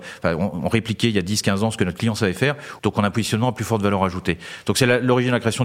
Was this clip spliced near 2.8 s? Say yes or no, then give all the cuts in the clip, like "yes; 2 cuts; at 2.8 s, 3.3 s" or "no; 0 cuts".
yes; 1 cut; at 2.8 s